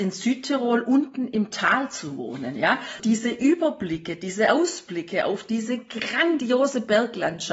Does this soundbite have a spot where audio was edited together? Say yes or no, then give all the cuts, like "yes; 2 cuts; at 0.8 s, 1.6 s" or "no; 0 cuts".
yes; 1 cut; at 3.0 s